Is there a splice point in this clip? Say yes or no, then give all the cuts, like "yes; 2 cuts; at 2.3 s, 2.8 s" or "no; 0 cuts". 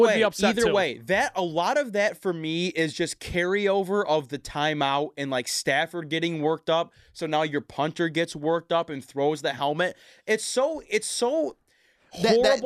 no; 0 cuts